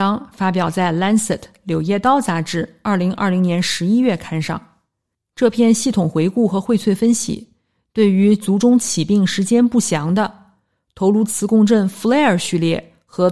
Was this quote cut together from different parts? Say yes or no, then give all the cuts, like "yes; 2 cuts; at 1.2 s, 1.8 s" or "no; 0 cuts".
no; 0 cuts